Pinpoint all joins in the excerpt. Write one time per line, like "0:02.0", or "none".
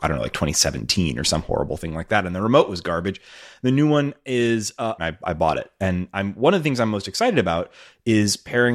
0:05.0